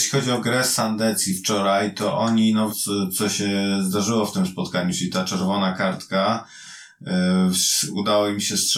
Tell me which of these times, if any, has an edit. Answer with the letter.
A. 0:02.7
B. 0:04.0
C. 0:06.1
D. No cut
A